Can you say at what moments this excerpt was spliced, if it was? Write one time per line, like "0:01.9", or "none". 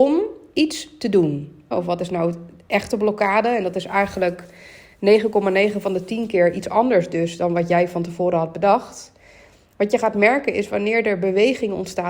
0:01.7